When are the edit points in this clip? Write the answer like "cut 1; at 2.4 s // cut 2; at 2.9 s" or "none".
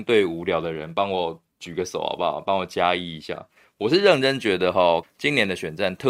cut 1; at 5.0 s